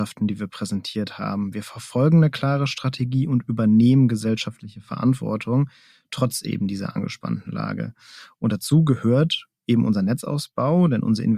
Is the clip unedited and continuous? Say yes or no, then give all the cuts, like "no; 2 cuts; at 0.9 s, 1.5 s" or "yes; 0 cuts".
yes; 0 cuts